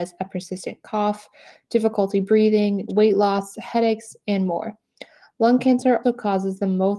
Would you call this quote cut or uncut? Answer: cut